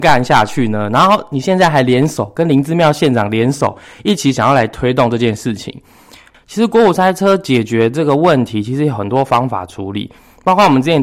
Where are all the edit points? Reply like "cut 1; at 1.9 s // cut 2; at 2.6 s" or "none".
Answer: cut 1; at 6.3 s